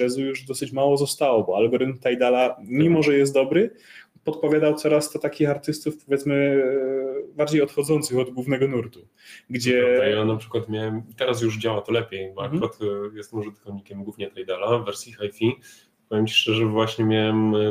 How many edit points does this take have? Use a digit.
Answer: 0